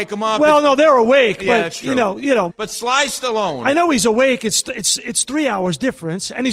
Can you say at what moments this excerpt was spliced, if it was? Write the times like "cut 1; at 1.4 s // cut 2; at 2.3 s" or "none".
cut 1; at 2.5 s